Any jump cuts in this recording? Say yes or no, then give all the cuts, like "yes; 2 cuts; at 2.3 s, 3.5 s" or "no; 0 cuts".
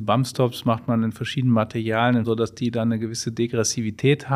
yes; 1 cut; at 2.2 s